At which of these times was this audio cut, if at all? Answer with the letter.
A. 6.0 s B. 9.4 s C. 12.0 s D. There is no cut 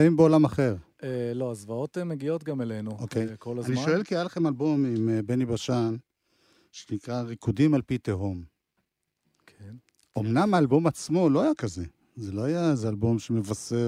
D